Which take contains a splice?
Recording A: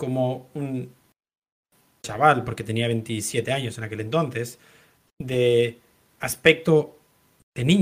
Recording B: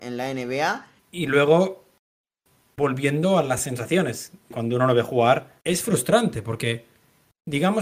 B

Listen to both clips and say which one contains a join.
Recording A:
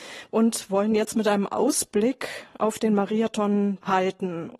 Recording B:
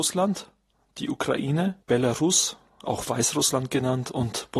B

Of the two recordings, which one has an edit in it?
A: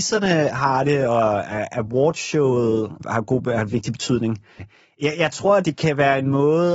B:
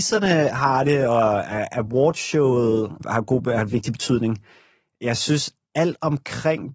A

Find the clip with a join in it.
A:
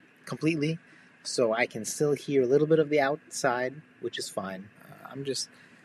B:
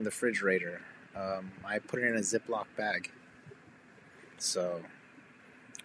A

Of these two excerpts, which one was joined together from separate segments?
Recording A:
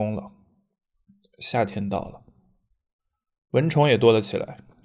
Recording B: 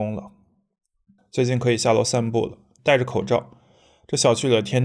B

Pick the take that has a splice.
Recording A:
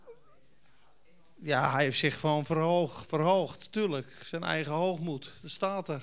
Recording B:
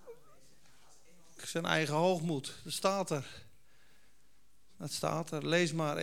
B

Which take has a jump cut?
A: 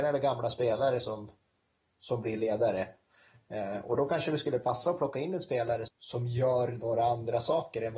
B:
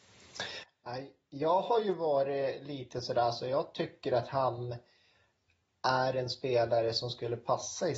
A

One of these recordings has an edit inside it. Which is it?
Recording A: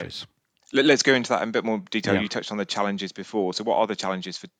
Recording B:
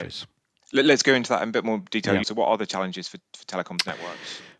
B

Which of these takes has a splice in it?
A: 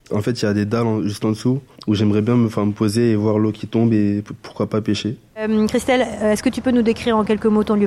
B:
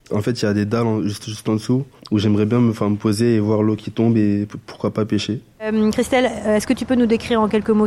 A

